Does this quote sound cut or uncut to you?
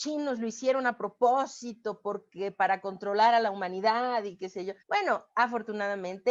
cut